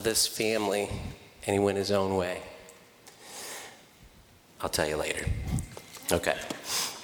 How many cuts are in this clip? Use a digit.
1